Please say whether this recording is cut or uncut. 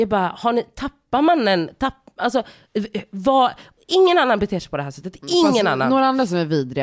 uncut